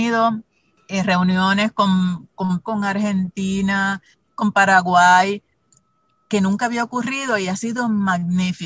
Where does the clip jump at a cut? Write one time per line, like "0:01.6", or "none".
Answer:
0:02.6